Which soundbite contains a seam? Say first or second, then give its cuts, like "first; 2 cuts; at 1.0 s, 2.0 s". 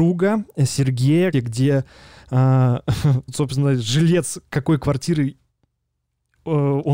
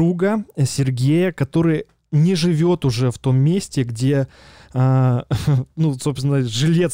first; 2 cuts; at 1.3 s, 3.3 s